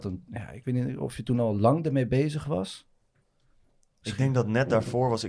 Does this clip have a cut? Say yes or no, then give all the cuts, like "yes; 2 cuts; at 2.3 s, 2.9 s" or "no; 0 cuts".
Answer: no; 0 cuts